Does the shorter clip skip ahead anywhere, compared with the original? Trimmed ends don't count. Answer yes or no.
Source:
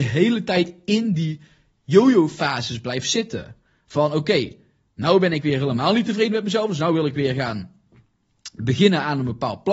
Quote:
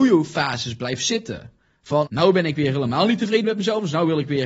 yes